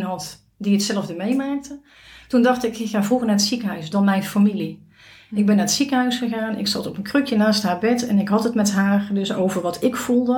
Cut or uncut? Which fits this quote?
cut